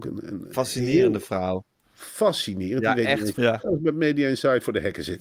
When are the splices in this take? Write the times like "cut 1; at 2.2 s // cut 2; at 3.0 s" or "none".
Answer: cut 1; at 3.3 s